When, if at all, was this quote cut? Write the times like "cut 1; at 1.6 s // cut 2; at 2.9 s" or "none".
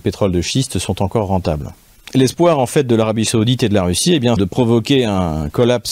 cut 1; at 4.4 s